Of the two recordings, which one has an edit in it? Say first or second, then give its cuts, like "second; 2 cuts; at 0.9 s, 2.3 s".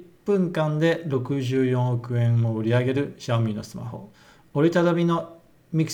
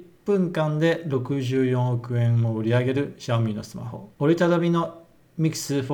second; 1 cut; at 4.1 s